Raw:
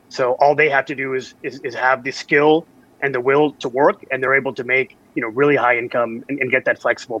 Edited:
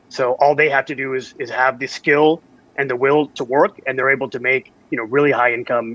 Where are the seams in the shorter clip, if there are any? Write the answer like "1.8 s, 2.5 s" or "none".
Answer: 1.4 s

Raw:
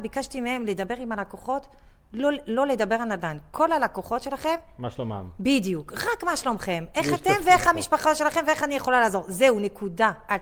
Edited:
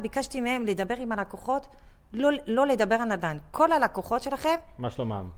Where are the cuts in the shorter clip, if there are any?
none

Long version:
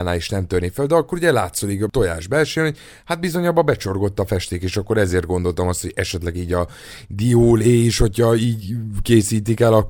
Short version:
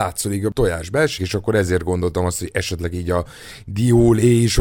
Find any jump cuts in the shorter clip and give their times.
1.2 s

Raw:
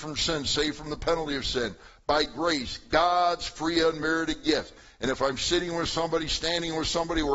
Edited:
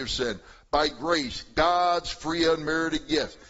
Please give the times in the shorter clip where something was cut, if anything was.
none

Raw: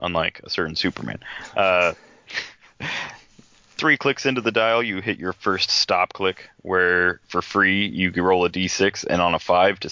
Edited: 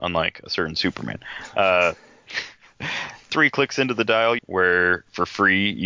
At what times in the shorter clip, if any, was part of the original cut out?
3.2 s, 4.4 s

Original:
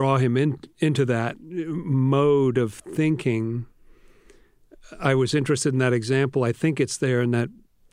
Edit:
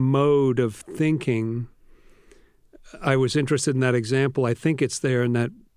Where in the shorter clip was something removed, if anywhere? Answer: none

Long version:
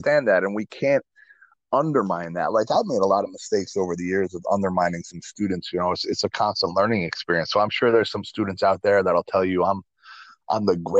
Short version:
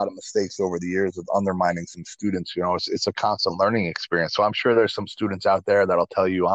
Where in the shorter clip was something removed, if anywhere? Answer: none

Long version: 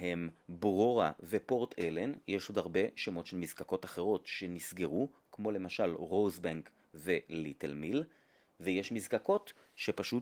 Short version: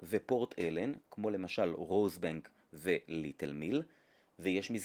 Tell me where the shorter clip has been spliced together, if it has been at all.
1.0 s

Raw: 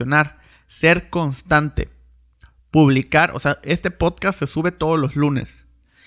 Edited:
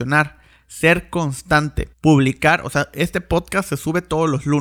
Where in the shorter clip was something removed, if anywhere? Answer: 1.9 s

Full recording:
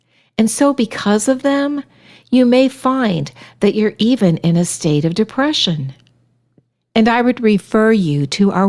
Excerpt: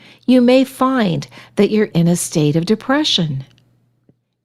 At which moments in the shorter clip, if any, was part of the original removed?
1.9 s

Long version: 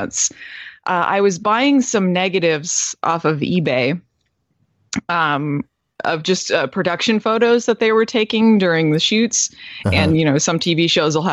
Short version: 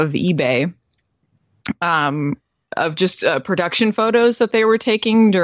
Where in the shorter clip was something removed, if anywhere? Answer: none

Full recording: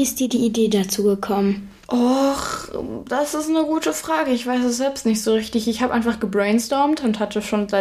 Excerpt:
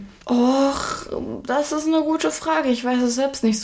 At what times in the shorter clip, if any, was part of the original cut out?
none

